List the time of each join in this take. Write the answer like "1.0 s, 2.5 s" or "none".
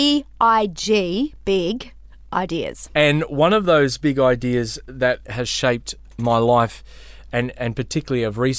2.9 s, 5.2 s